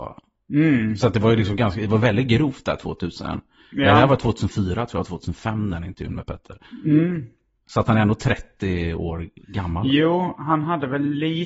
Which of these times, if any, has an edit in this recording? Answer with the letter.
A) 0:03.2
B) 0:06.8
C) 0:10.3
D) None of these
D